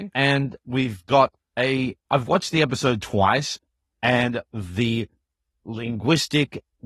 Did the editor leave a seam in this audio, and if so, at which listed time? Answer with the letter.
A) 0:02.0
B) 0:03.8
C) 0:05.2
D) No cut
A